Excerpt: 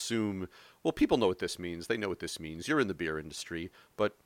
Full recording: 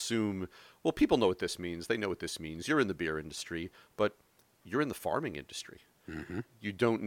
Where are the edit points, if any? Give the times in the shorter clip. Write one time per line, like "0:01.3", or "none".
none